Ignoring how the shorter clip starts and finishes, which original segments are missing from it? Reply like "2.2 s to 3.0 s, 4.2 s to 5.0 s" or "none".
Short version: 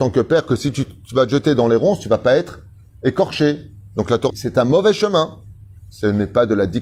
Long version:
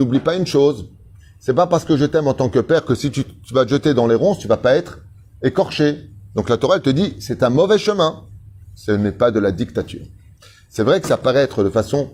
6.7 s to 7.1 s